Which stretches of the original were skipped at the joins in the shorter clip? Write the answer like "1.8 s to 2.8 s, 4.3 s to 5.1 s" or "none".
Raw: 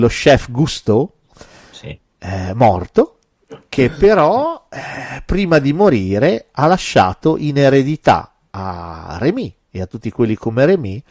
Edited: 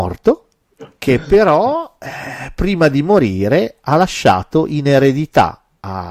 none